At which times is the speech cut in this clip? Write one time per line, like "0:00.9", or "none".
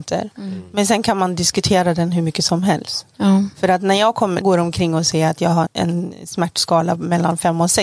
0:04.4
0:05.7

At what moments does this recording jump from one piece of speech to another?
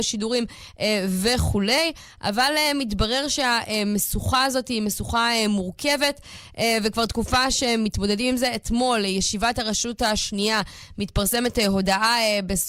none

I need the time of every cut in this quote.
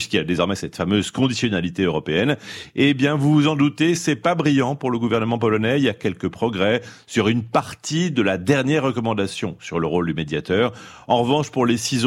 none

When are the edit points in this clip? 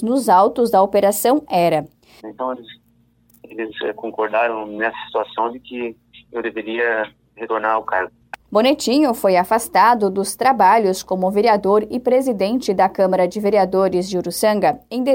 0:02.2

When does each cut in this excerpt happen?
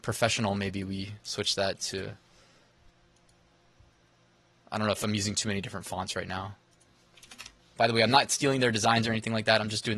0:07.8

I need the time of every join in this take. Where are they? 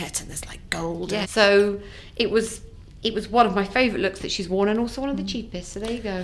0:01.2

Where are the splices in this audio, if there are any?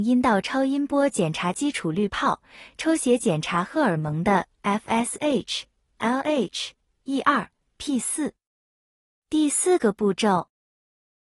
0:09.2

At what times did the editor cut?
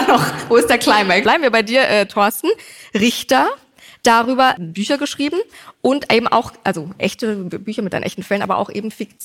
0:01.2

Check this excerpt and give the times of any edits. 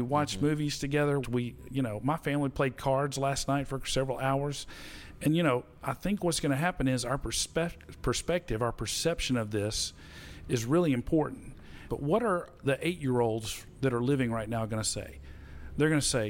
0:01.2
0:11.9

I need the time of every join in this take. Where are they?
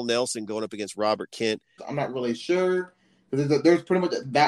0:01.8

